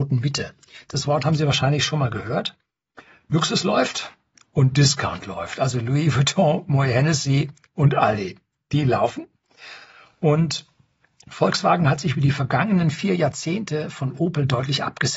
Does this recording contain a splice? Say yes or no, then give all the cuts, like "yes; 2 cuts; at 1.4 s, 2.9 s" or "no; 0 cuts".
no; 0 cuts